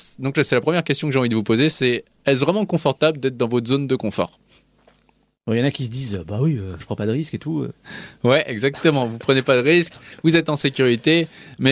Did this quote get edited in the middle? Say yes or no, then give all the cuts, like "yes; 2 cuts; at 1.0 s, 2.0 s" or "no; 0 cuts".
yes; 1 cut; at 6.8 s